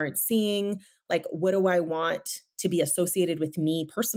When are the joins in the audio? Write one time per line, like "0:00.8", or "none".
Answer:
none